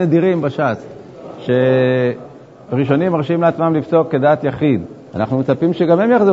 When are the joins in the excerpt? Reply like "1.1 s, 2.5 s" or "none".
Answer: 5.1 s